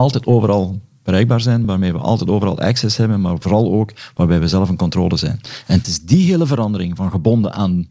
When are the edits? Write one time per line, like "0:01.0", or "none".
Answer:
none

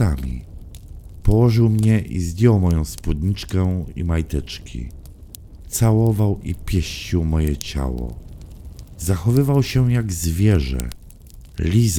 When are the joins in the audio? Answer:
none

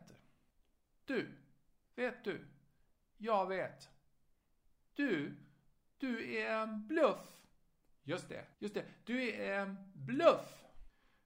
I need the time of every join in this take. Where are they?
0:04.8
0:08.5

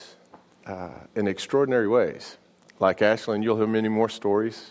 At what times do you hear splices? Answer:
none

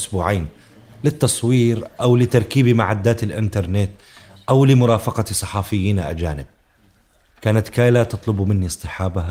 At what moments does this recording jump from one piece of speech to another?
none

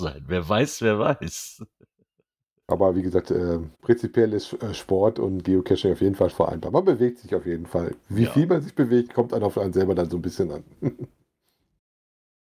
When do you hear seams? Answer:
0:03.7
0:06.3

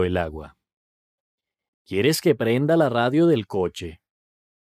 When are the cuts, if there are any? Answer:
0:01.7

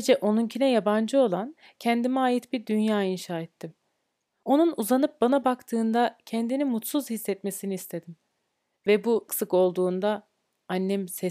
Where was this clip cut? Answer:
0:09.3

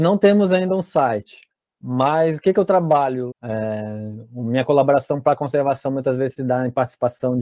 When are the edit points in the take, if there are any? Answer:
0:03.3

